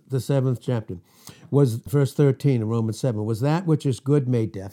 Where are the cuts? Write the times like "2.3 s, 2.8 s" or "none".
1.9 s